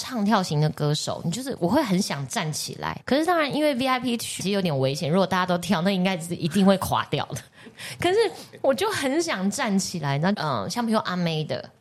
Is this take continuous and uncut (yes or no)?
no